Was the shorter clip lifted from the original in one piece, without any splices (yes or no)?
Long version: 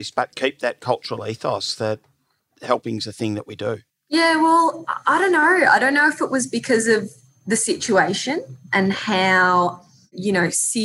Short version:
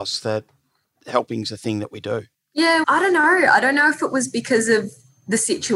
no